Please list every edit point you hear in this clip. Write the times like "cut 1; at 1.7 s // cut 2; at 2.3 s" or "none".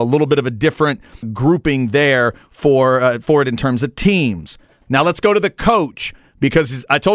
cut 1; at 1.2 s